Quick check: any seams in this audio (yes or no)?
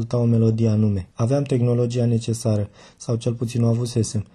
yes